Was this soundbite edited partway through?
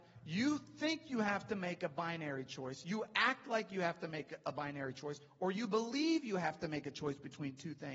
no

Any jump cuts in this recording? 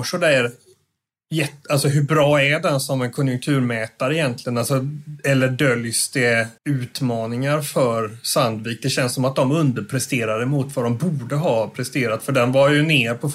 yes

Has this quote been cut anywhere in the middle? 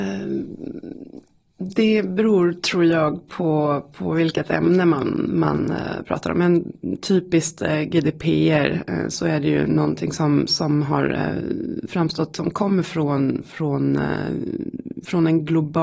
no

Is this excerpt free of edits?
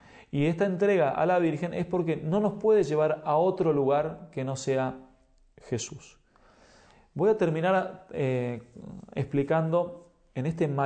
yes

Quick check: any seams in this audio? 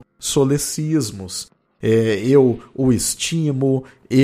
yes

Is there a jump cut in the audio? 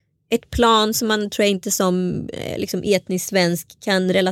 no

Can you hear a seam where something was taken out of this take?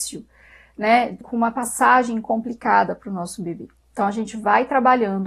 yes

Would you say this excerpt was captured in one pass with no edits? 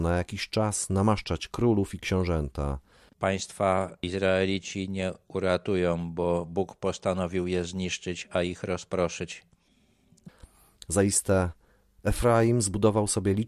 no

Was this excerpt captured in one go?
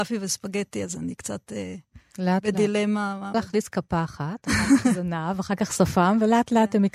no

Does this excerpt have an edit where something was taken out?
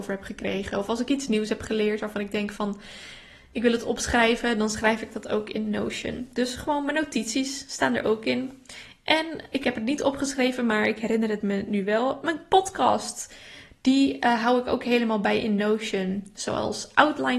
yes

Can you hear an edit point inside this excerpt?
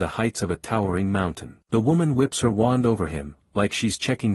yes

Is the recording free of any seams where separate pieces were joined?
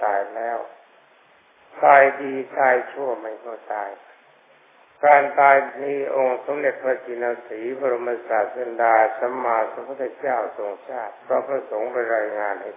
no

